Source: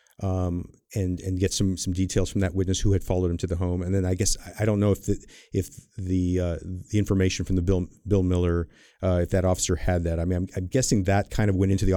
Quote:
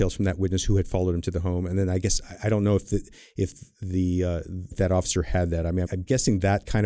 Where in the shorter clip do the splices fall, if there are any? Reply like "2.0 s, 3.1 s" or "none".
4.7 s, 5.8 s